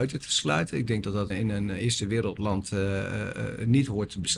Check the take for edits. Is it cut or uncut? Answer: cut